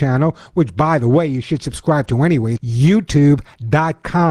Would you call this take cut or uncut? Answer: cut